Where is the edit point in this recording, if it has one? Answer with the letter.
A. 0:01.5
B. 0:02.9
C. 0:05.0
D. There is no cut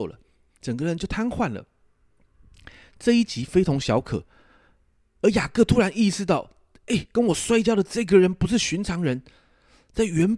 D